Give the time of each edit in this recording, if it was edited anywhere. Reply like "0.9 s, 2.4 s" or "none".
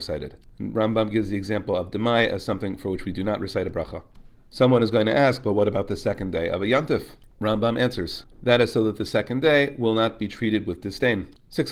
none

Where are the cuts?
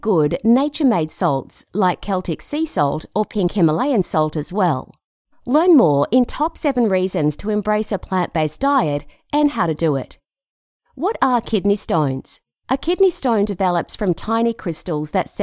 none

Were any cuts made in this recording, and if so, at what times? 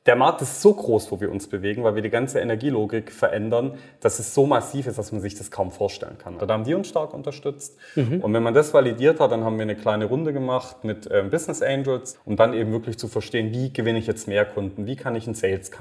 6.4 s, 8.2 s, 12.1 s

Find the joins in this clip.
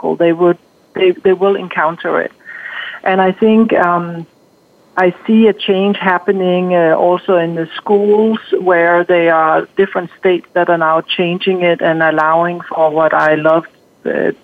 none

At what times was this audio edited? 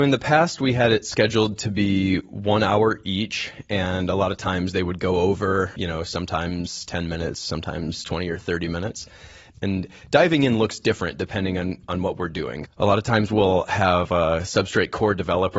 9.5 s, 12.6 s

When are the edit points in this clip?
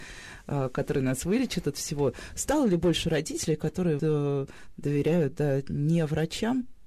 4.0 s

